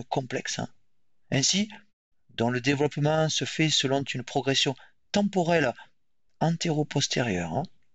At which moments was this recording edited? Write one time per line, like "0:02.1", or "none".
0:02.1